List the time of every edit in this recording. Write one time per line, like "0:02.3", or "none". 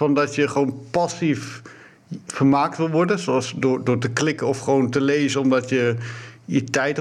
none